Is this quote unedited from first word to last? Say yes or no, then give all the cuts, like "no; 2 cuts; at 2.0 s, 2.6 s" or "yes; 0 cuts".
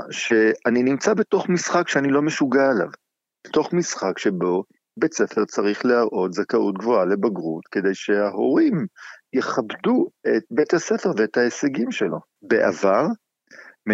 no; 1 cut; at 12.4 s